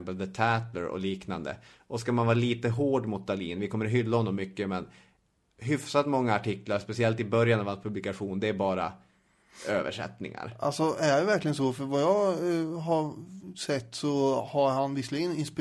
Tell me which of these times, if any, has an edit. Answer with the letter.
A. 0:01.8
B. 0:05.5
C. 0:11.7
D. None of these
D